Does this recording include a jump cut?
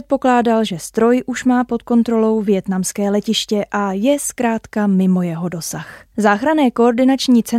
yes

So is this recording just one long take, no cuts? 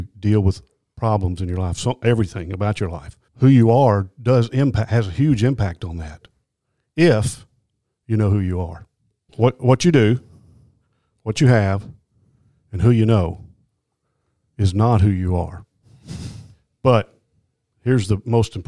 no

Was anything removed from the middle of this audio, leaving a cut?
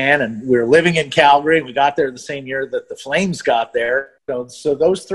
yes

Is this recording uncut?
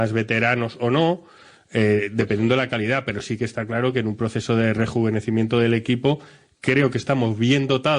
yes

